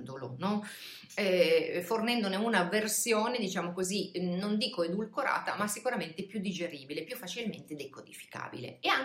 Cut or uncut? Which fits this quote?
uncut